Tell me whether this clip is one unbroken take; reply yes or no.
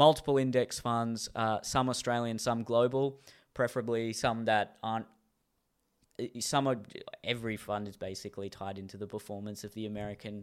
yes